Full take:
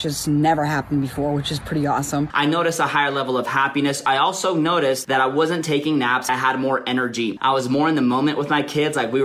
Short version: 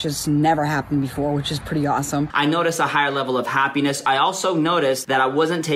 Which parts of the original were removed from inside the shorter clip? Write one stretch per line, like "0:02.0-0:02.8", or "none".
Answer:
none